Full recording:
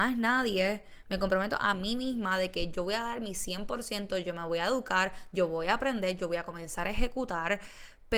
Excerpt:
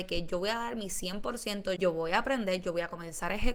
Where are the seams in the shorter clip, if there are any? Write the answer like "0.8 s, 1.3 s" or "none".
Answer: 1.8 s